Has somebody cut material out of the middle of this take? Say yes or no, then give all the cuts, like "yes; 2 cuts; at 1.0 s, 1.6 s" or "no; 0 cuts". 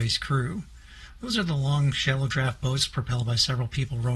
no; 0 cuts